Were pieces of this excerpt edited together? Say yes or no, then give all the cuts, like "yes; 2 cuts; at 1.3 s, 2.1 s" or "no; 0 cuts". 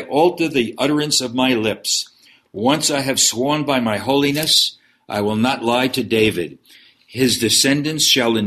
no; 0 cuts